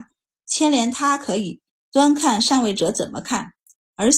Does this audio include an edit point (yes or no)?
yes